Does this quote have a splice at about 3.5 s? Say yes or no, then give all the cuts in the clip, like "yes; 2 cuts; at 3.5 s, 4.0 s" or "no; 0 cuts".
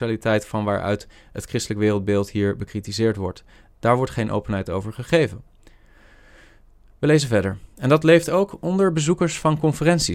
no; 0 cuts